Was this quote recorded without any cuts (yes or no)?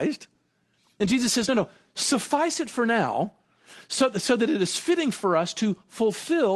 yes